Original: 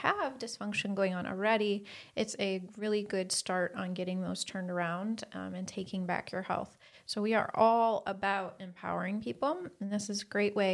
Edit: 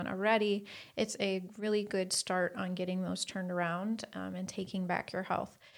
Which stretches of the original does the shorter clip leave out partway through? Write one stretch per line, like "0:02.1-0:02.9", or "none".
none